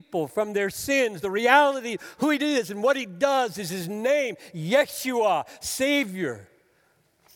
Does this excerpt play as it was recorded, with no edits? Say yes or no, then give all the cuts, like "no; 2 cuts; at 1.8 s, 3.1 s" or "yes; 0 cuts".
yes; 0 cuts